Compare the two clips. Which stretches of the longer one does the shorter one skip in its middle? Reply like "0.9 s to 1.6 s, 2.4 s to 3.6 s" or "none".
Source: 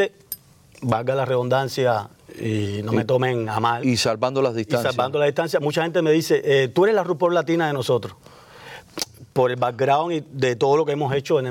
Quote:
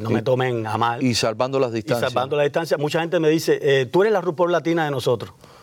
none